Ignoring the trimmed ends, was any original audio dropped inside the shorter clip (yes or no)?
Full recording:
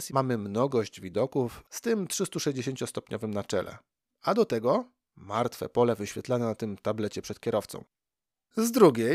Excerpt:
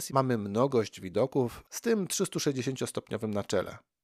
no